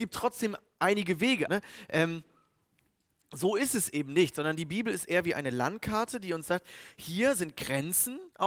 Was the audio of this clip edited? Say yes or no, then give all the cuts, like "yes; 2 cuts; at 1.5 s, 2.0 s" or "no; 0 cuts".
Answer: yes; 1 cut; at 1.5 s